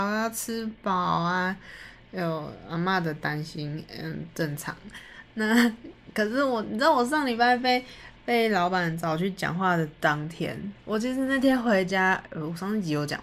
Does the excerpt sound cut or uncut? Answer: uncut